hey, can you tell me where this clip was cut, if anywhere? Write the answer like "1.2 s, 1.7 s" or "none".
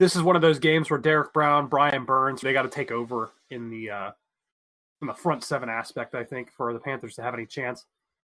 2.4 s